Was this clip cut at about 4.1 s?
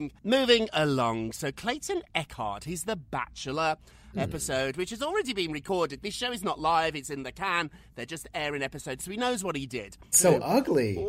yes; 2 cuts; at 4.1 s, 10.1 s

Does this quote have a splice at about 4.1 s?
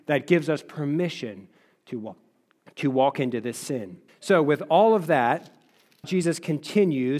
yes; 2 cuts; at 4.1 s, 6.0 s

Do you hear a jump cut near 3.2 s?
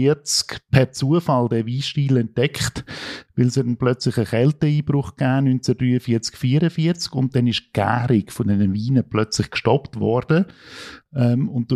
no; 0 cuts

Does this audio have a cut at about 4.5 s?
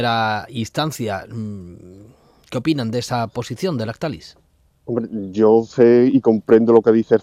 no; 0 cuts

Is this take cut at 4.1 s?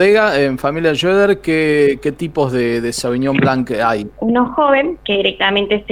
yes; 1 cut; at 4.1 s

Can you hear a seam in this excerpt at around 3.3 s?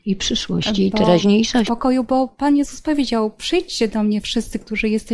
no; 1 cut; at 1.7 s

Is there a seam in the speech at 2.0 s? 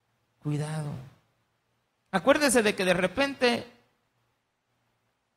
yes; 1 cut; at 2.0 s

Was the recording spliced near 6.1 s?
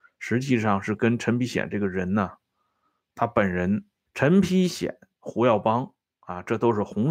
no; 1 cut; at 4.1 s

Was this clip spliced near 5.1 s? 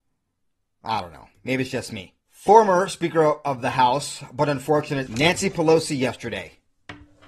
yes; 2 cuts; at 2.2 s, 5.1 s

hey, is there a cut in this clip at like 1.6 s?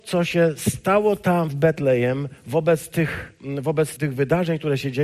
no; 1 cut; at 4.0 s

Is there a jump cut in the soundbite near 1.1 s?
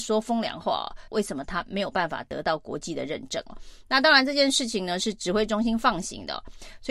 yes; 1 cut; at 1.1 s

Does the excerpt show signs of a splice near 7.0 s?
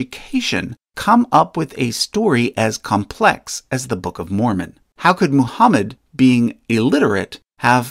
no; 1 cut; at 4.9 s

